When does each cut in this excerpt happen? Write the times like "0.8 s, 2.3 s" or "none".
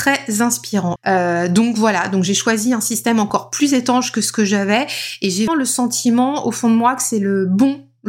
1.0 s, 5.5 s